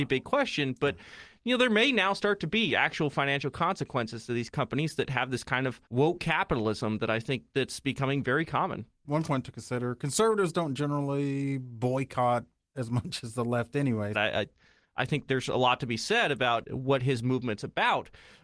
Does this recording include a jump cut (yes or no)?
yes